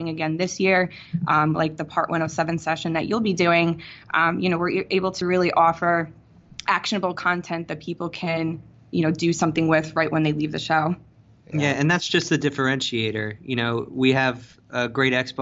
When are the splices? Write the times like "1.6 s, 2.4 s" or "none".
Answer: none